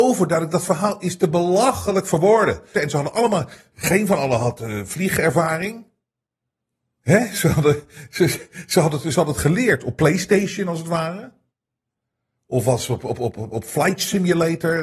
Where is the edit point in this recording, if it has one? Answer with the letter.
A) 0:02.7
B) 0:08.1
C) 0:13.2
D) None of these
A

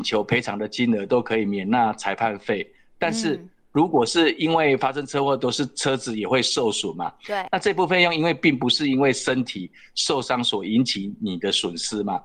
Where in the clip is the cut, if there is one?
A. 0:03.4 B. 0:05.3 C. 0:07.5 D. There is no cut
C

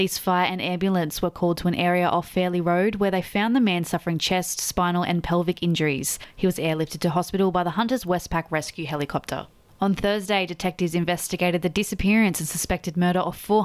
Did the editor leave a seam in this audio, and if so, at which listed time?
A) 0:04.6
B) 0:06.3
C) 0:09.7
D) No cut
D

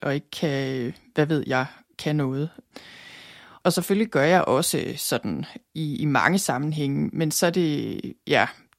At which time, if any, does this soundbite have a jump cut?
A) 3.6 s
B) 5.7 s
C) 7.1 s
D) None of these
A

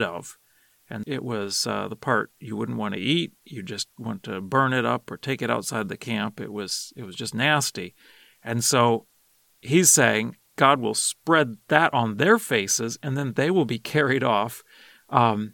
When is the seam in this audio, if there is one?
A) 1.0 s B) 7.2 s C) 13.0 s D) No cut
A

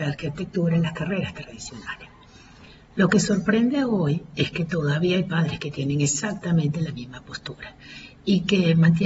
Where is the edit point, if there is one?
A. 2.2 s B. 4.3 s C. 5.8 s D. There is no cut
D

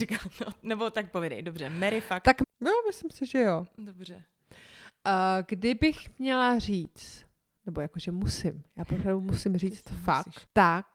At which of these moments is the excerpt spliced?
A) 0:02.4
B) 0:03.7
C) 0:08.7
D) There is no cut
A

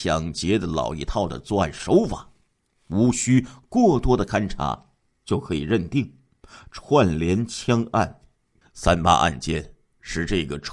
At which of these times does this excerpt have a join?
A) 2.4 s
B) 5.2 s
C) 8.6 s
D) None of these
C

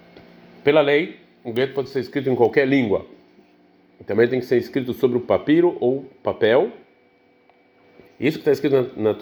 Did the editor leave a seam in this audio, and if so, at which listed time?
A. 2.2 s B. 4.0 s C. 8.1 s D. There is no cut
C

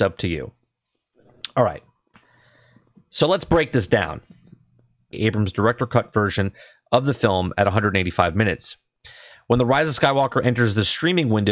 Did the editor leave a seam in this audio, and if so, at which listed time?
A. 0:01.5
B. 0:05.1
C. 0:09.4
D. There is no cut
B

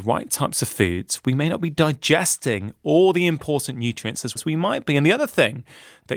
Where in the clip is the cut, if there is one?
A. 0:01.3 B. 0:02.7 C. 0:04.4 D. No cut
C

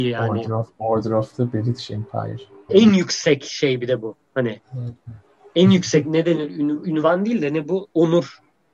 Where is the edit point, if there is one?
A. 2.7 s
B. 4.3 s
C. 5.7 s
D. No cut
A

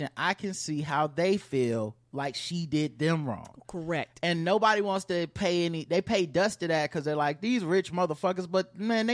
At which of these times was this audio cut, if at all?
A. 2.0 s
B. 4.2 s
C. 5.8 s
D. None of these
D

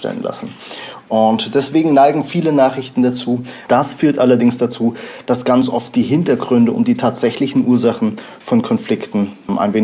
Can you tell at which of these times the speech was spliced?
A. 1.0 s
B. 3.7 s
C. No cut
B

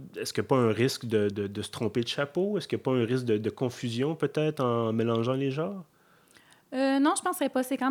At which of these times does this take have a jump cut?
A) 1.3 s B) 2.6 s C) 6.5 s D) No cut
A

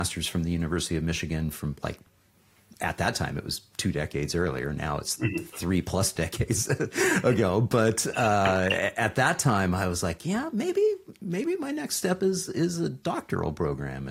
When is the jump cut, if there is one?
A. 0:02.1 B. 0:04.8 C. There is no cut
C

